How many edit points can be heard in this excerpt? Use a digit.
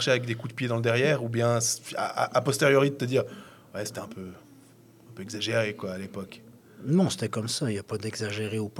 0